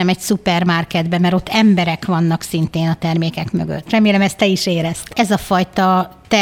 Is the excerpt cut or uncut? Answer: cut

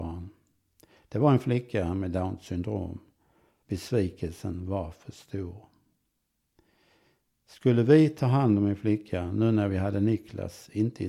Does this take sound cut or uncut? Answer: cut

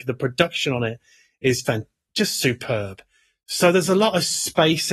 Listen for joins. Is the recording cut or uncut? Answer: cut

